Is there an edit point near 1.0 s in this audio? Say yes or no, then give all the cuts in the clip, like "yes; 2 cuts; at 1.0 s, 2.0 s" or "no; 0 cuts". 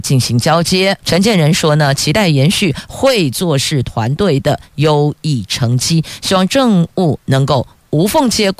yes; 1 cut; at 1.0 s